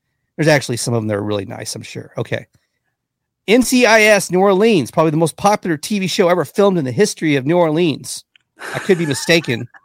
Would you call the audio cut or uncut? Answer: uncut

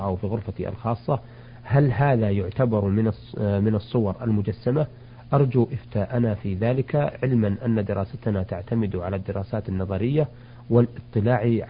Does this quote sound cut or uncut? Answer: uncut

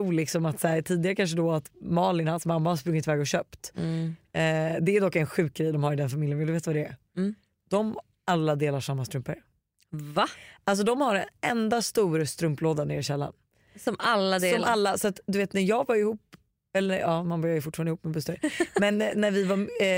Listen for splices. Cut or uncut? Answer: uncut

